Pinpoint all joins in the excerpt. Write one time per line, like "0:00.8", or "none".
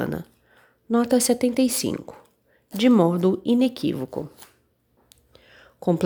none

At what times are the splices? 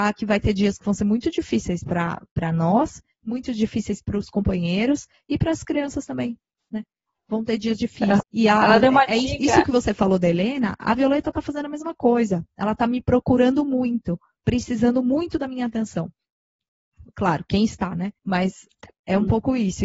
0:08.2
0:17.1
0:18.2

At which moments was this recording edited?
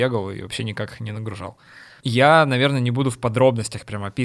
none

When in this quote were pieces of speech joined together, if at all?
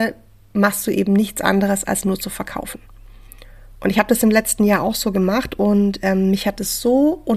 none

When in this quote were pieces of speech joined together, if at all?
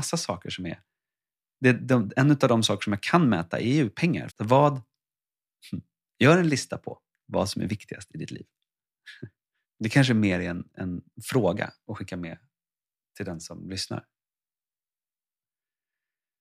0:04.3
0:09.6
0:11.1

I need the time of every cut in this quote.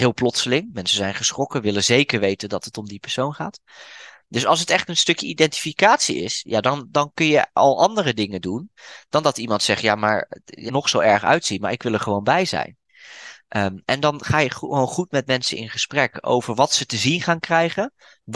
0:10.7

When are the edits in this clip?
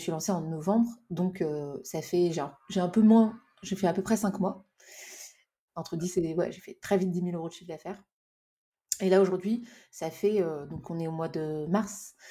0:05.7

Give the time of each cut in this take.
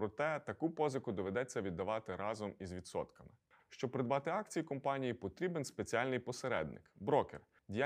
0:03.6

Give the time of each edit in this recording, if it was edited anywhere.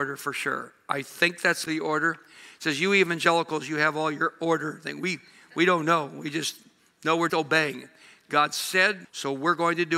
0:01.7
0:07.3
0:09.0

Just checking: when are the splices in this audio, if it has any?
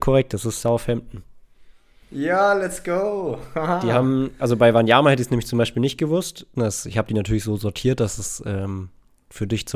0:06.6

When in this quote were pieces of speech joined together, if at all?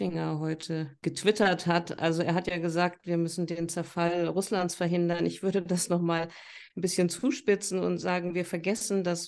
none

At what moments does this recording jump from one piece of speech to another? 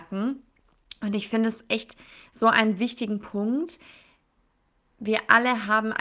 none

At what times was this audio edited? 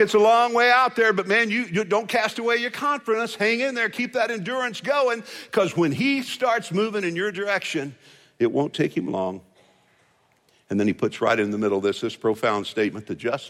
none

